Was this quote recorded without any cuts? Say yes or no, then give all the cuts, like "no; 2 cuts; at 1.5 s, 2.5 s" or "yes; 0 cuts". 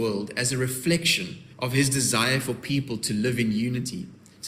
no; 1 cut; at 1.5 s